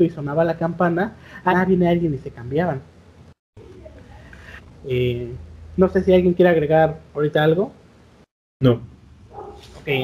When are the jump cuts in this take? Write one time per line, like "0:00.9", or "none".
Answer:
0:01.5